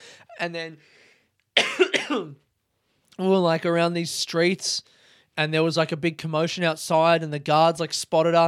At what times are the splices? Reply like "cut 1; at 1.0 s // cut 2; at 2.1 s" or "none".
none